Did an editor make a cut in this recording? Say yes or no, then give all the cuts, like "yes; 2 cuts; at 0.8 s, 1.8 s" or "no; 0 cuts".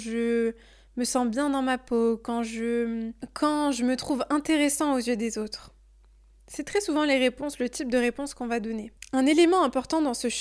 no; 0 cuts